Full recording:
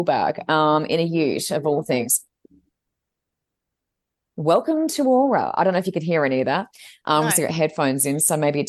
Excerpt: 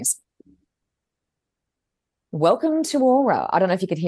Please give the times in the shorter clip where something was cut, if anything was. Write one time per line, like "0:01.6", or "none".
none